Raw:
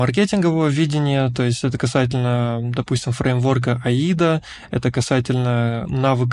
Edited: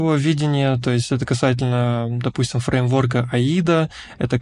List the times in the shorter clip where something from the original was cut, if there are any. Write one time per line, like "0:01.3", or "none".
none